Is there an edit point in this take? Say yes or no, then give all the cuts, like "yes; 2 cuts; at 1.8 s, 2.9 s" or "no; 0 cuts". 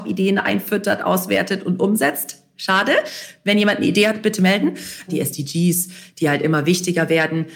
yes; 1 cut; at 5.1 s